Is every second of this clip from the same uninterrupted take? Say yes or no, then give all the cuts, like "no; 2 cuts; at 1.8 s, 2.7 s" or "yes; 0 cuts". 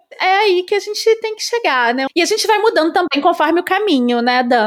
no; 1 cut; at 2.1 s